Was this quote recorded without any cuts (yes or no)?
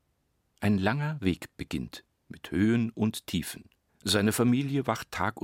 no